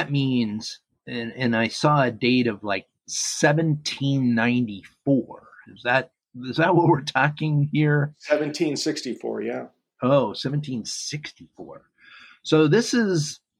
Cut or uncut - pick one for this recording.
uncut